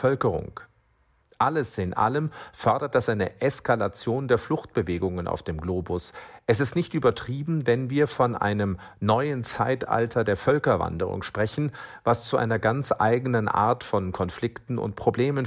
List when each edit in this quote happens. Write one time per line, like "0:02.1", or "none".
0:01.2